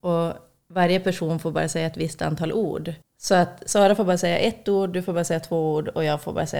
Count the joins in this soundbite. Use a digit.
1